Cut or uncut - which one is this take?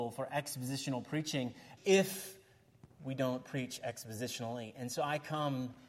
cut